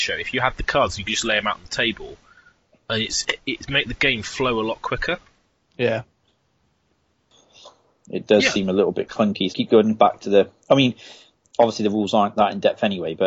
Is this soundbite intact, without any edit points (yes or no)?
no